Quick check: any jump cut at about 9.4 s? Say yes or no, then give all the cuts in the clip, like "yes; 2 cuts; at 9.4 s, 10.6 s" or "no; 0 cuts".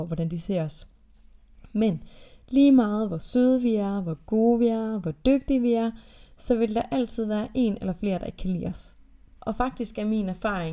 yes; 1 cut; at 9.4 s